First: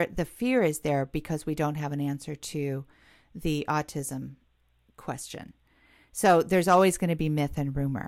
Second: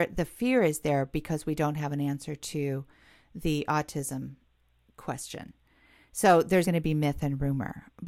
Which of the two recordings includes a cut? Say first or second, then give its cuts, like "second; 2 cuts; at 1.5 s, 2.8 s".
second; 1 cut; at 6.6 s